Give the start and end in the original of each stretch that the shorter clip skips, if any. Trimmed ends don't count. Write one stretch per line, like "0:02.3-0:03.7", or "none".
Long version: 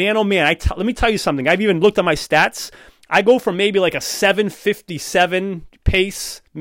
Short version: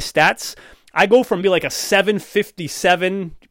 0:03.6-0:03.7